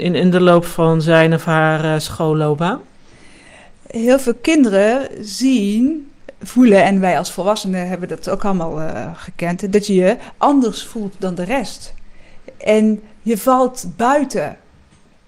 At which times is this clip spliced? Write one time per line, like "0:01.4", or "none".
none